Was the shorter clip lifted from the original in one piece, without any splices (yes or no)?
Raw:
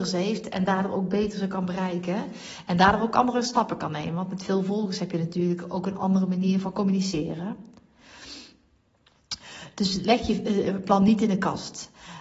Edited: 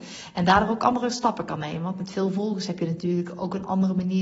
yes